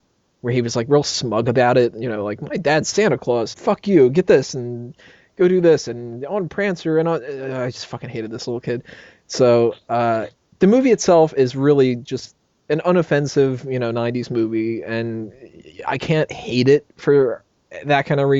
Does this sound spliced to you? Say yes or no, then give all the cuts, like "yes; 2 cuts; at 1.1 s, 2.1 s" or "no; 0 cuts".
yes; 1 cut; at 3.5 s